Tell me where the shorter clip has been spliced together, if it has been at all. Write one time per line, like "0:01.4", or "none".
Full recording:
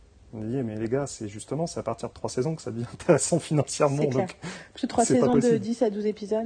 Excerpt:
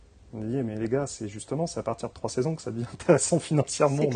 none